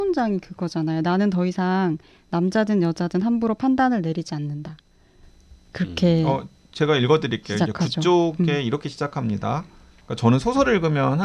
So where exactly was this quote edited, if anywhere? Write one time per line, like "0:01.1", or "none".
none